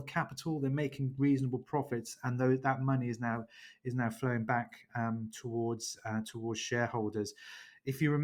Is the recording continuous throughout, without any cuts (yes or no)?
yes